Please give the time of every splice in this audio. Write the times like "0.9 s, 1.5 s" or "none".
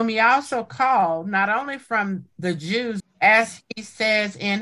3.0 s